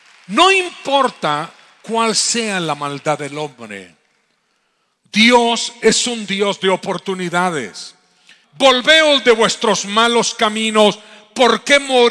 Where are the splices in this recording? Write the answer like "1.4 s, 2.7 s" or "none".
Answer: 8.4 s